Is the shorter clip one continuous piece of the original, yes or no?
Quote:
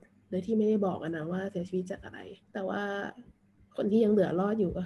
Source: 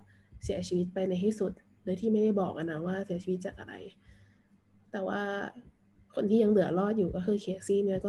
no